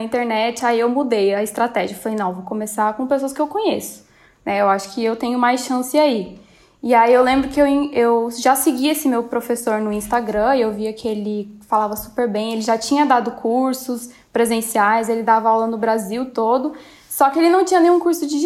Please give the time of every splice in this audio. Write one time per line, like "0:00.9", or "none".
none

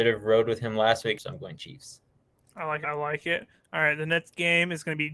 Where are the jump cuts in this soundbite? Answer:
0:01.2
0:02.8

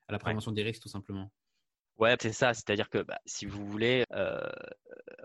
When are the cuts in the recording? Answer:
0:02.2
0:04.0

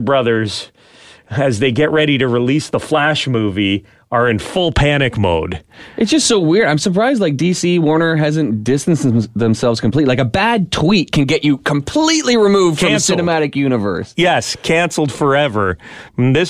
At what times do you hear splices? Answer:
none

